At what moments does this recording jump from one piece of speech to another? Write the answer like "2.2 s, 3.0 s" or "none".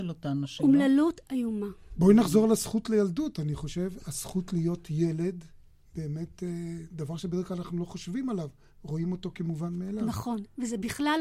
none